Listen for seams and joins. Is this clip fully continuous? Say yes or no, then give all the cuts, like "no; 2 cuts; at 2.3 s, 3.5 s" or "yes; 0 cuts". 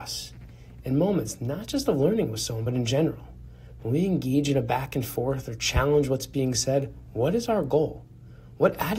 yes; 0 cuts